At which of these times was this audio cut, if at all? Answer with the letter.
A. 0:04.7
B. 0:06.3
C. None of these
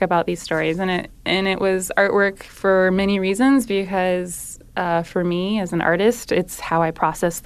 C